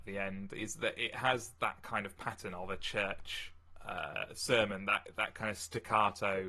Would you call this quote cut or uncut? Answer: uncut